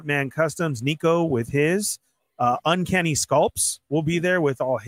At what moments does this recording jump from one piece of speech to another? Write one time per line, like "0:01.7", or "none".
none